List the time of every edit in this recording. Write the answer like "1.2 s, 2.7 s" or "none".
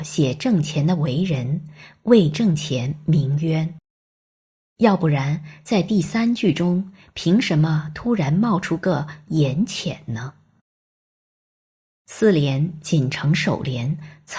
none